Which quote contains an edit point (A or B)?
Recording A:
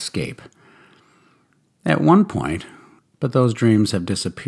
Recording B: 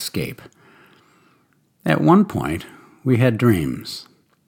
A